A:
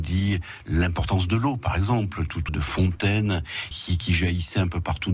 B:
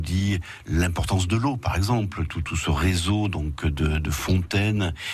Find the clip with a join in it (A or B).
A